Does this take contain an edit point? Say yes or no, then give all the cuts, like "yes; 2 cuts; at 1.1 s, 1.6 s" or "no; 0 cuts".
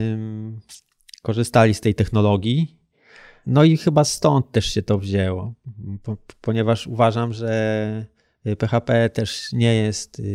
no; 0 cuts